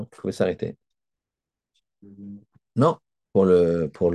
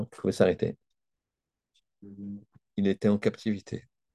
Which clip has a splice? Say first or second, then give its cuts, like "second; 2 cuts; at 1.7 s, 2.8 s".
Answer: second; 1 cut; at 2.7 s